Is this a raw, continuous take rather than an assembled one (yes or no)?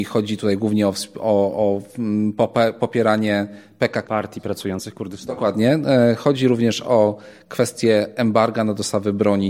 no